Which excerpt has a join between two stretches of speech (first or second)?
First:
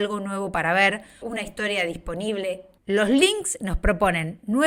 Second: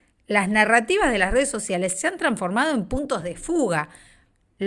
first